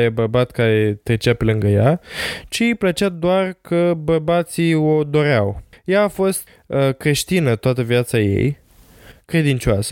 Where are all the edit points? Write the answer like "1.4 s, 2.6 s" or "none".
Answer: none